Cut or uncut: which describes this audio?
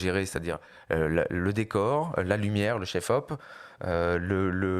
uncut